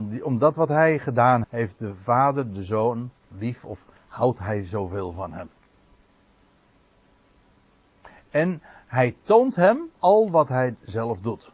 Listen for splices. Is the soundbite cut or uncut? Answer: cut